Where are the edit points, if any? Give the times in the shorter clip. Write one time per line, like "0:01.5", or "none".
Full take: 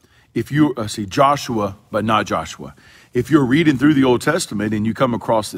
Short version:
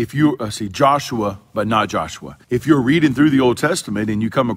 0:02.4